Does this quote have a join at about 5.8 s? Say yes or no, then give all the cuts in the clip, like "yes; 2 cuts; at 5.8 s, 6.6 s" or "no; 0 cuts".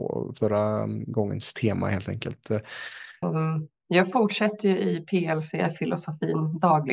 no; 1 cut; at 3.2 s